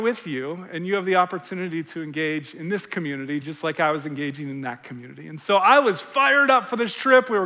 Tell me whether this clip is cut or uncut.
uncut